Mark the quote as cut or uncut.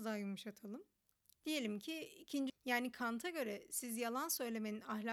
cut